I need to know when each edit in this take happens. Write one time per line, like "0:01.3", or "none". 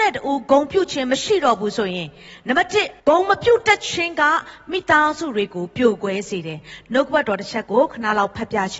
0:03.0